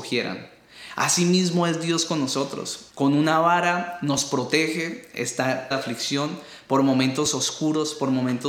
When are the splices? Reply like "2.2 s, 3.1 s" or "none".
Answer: 2.9 s, 5.7 s